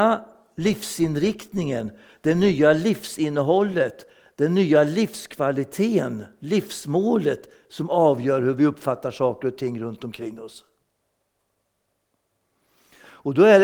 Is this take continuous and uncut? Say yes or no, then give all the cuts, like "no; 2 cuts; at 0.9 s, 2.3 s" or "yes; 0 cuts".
yes; 0 cuts